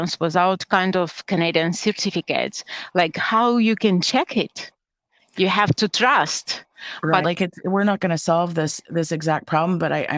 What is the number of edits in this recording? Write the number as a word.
one